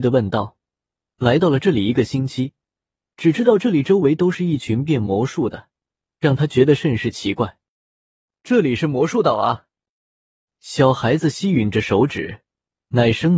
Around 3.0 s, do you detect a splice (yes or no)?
yes